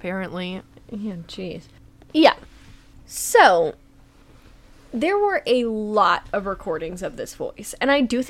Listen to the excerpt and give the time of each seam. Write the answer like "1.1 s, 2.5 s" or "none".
2.1 s